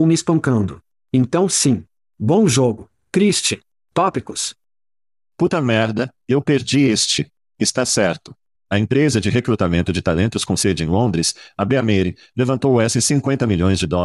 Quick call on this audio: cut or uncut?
cut